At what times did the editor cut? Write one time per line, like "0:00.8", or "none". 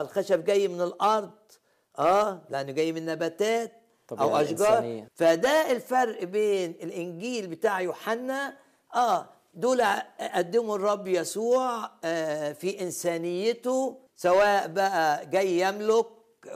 0:05.1
0:14.1